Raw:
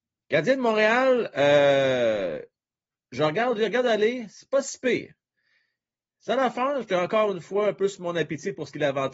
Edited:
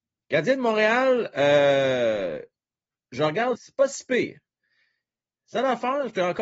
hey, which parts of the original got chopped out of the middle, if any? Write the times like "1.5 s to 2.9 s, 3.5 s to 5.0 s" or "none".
3.6 s to 4.3 s